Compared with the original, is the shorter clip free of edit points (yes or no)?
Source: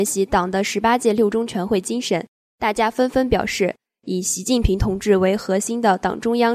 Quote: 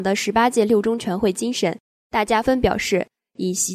no